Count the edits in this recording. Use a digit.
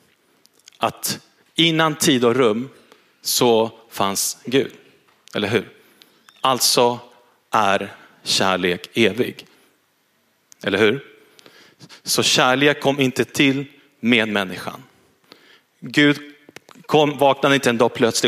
0